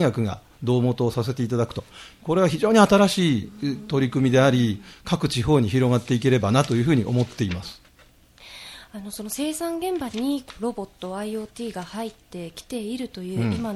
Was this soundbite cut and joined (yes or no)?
no